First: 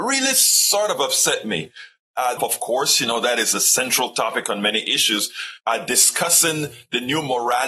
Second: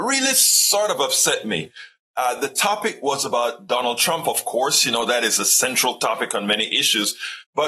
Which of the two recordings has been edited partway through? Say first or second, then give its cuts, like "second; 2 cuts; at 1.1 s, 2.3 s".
first; 2 cuts; at 2.4 s, 5.6 s